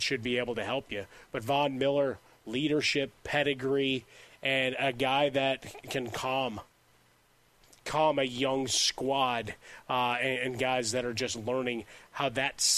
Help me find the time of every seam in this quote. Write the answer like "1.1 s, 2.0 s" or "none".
5.8 s